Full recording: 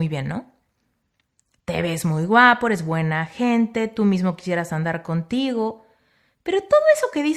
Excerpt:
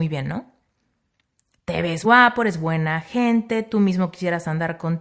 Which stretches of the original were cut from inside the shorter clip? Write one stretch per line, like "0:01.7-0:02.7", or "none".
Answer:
0:02.0-0:02.3